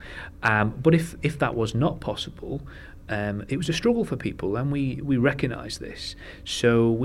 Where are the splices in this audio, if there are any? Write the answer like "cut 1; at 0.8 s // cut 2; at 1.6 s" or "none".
none